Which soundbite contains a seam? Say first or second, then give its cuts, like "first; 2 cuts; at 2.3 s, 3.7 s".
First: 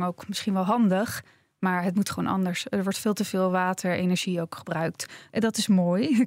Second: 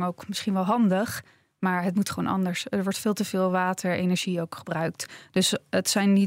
first; 1 cut; at 5.3 s